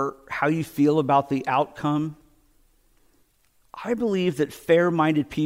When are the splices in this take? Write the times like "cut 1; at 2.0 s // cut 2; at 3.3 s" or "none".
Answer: none